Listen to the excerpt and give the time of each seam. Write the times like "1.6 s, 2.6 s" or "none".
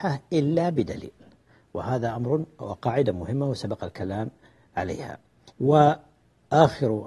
5.5 s